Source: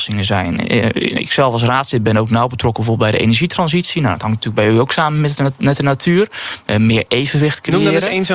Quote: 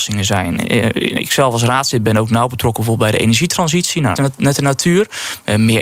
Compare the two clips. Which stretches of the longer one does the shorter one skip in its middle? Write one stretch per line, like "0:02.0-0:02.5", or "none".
0:04.2-0:05.4